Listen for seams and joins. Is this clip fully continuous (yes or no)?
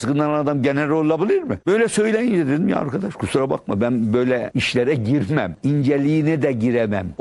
no